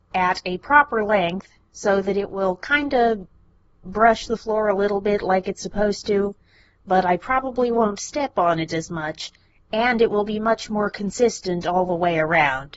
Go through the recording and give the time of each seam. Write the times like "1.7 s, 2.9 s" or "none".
none